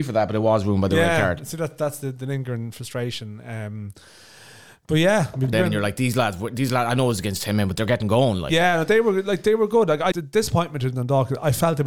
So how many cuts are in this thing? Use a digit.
2